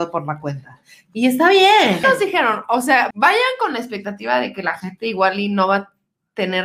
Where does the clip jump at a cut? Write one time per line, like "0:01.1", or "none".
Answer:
0:02.0
0:03.1